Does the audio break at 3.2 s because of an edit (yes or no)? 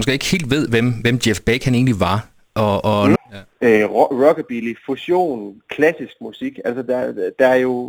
yes